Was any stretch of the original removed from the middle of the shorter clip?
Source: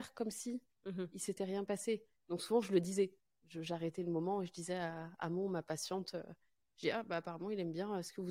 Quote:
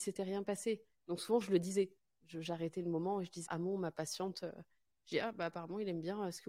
yes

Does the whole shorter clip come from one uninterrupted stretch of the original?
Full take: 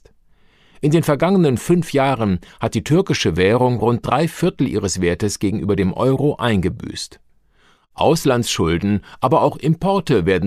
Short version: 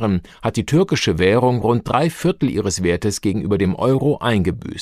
yes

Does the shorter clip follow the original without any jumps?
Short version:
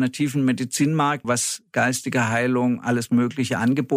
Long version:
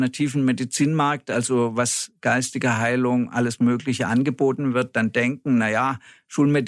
no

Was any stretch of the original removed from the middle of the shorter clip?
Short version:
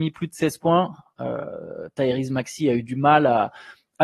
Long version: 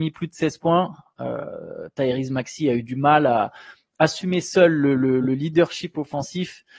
no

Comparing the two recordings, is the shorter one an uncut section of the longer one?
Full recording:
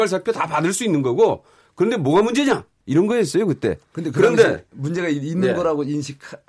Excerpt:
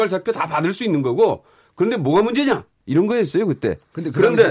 yes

